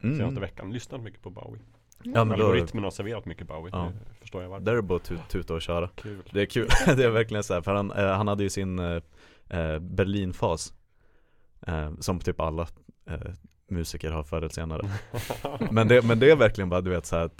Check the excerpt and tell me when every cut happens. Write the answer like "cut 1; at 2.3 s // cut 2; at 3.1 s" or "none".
none